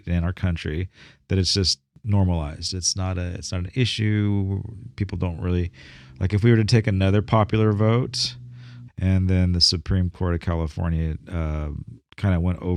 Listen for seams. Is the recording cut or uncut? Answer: cut